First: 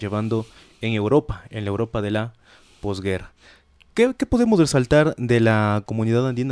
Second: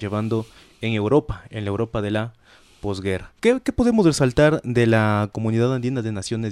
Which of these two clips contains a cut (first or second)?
second